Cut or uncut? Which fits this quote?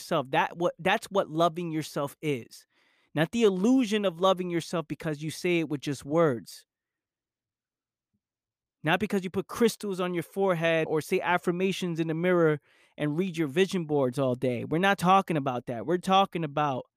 cut